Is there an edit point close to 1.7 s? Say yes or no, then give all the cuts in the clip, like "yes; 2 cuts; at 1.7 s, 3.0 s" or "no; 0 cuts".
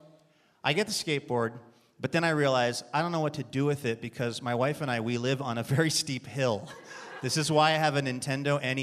no; 1 cut; at 7.2 s